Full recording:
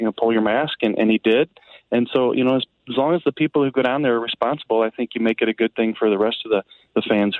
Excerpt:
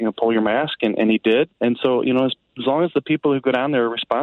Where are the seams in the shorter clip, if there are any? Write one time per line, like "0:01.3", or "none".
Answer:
0:01.6